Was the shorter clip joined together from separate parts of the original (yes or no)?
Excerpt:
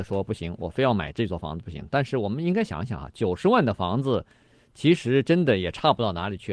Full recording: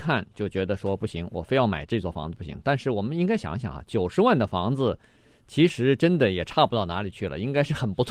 no